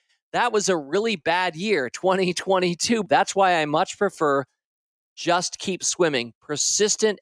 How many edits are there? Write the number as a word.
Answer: one